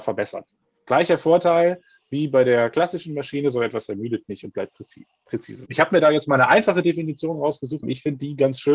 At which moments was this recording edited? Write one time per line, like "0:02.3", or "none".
0:05.7
0:07.8